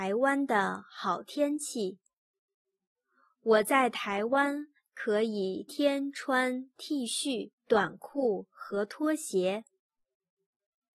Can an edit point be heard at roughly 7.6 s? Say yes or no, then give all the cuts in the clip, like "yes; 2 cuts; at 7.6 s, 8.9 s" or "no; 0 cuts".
yes; 2 cuts; at 5.7 s, 7.6 s